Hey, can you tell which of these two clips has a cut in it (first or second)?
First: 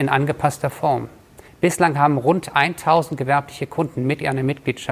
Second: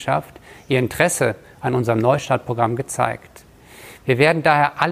first